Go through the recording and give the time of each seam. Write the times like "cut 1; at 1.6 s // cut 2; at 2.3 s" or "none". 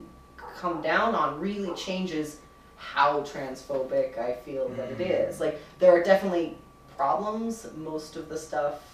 none